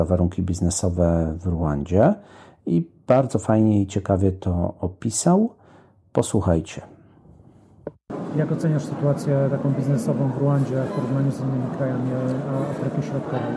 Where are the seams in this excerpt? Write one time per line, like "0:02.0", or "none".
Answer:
none